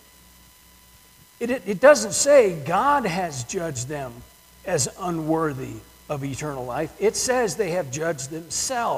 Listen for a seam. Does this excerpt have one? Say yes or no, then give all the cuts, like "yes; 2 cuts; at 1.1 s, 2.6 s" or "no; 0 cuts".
no; 0 cuts